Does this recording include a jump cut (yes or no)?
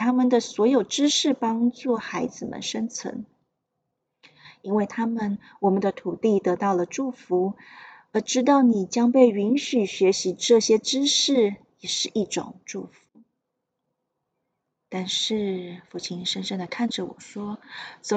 no